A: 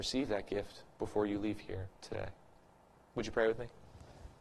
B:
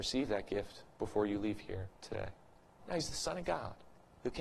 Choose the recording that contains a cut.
B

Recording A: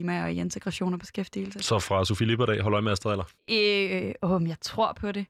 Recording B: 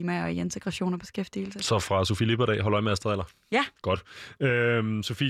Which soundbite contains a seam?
A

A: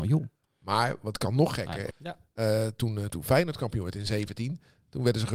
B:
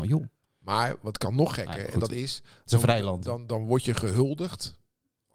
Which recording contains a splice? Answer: A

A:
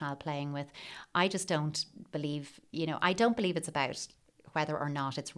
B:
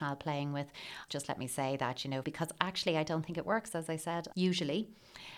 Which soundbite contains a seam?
B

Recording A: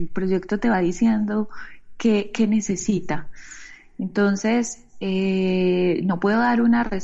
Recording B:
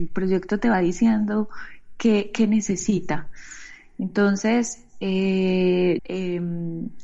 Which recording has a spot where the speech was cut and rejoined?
B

